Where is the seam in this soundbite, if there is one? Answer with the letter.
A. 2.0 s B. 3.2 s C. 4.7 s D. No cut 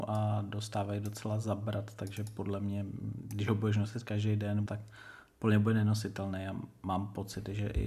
C